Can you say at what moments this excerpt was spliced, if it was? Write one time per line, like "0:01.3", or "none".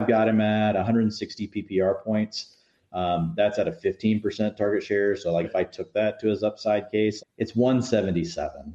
0:05.4
0:07.2